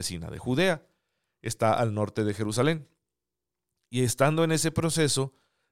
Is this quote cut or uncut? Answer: uncut